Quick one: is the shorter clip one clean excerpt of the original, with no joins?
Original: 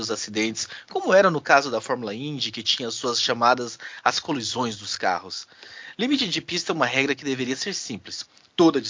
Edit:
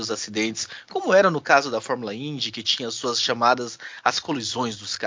yes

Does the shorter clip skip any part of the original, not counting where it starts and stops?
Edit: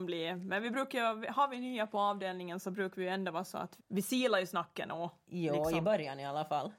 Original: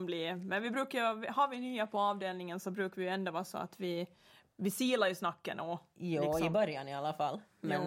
yes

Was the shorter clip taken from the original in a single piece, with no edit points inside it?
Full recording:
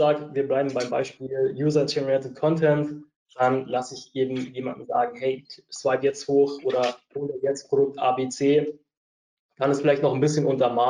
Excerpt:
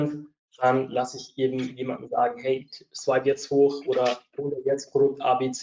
yes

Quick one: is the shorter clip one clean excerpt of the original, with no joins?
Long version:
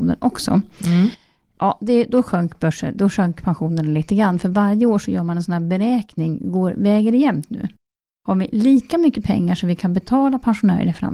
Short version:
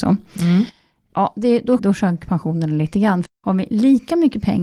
no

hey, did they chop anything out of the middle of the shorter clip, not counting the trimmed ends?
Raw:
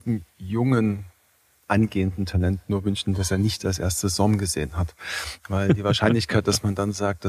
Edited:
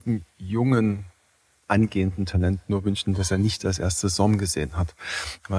no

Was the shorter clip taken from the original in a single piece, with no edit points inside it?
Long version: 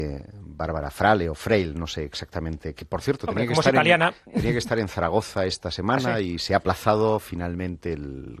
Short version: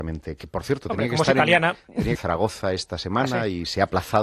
no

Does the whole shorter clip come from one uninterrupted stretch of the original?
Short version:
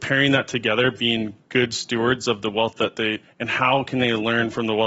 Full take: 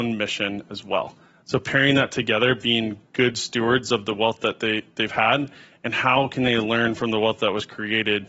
no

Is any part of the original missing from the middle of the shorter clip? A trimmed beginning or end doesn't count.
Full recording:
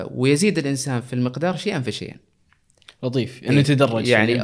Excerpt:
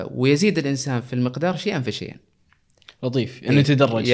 no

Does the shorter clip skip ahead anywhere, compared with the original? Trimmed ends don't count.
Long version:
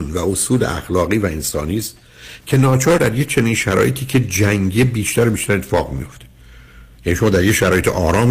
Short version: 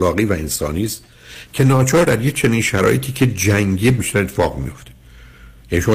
yes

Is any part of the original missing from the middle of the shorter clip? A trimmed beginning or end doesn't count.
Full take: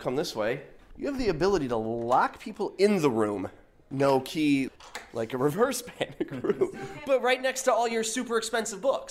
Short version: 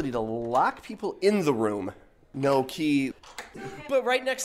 yes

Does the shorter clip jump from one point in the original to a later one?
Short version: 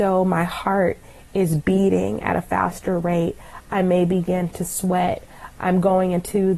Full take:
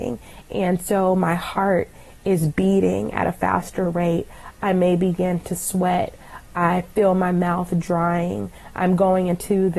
yes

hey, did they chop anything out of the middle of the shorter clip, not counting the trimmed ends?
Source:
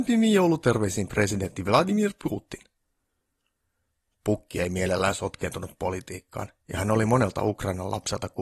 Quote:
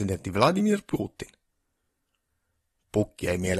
no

